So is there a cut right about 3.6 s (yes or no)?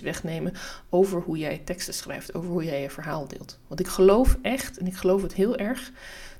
no